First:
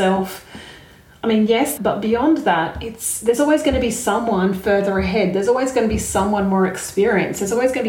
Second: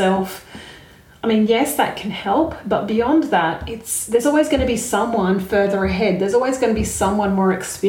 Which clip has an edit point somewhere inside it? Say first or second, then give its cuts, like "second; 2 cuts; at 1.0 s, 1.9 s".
first; 1 cut; at 1.8 s